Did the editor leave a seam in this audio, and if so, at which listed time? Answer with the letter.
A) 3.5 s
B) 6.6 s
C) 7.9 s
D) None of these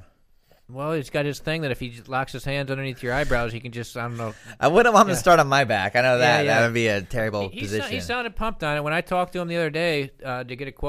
D